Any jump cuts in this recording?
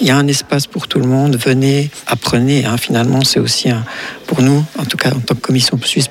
no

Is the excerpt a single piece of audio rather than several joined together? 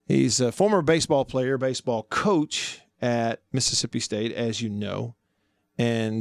yes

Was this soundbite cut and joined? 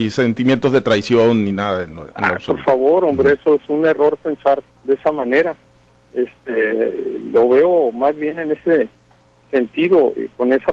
no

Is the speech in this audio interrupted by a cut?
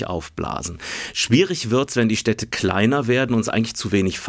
no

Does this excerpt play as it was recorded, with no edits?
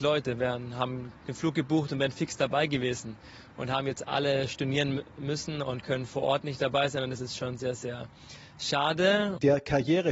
yes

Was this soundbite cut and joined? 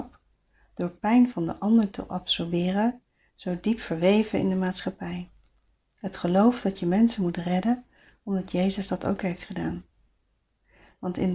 no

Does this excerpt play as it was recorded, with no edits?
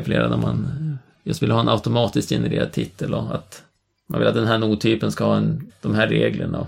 no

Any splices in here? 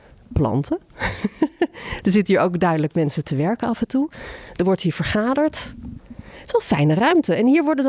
no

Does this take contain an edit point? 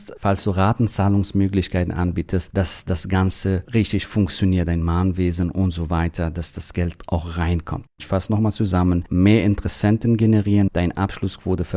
yes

